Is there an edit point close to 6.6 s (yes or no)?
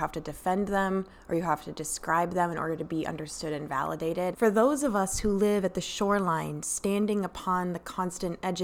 no